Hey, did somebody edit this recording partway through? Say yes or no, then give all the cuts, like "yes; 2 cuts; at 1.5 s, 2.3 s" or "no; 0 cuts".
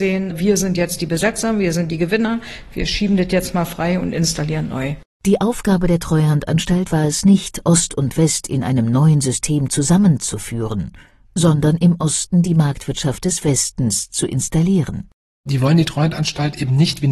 no; 0 cuts